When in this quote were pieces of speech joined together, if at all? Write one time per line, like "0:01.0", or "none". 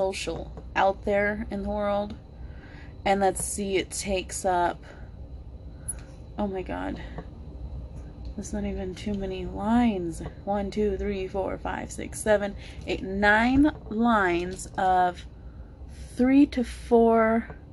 none